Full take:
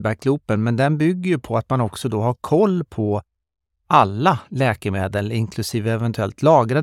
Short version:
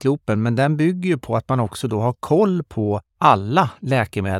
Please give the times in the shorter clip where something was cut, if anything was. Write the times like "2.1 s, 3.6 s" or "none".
3.1 s